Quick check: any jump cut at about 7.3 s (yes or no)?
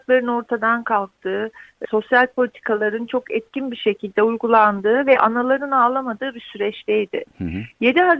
no